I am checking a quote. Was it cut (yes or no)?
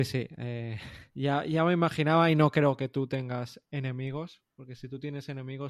yes